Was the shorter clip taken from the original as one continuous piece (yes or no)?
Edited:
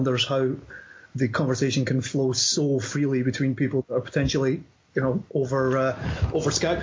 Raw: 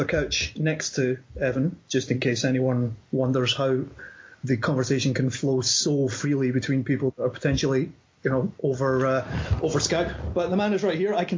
yes